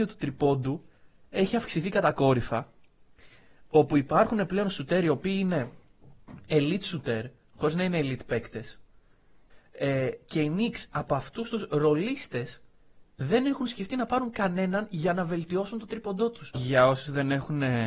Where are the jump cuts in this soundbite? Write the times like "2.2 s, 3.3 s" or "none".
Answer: 9.5 s, 16.5 s